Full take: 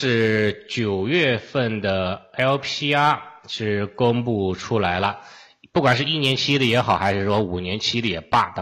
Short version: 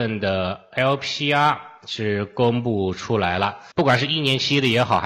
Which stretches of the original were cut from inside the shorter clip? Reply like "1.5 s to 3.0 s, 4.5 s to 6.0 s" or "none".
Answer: 5.3 s to 5.7 s